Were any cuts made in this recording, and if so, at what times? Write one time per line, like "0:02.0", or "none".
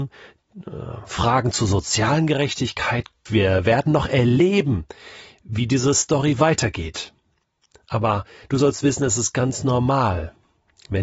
0:03.3